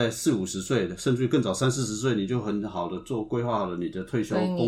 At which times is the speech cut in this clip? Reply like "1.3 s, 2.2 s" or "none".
none